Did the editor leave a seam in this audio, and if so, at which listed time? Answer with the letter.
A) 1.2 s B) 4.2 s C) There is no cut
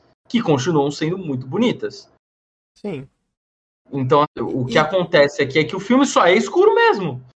B